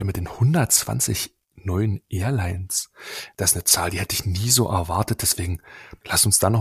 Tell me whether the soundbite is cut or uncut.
uncut